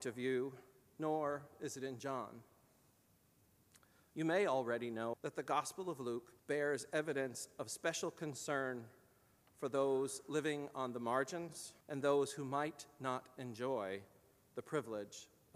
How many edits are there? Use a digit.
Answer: 3